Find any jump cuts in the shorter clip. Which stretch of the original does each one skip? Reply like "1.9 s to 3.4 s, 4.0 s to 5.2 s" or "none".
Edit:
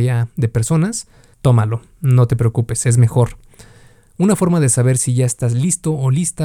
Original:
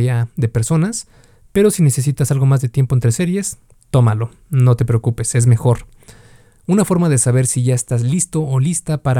1.3 s to 3.8 s